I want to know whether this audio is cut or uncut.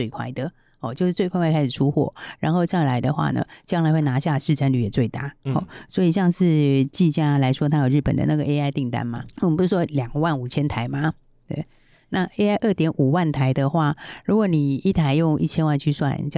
uncut